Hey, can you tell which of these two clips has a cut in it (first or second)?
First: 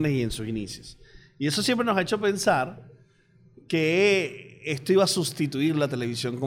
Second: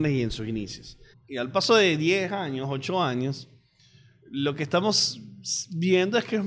second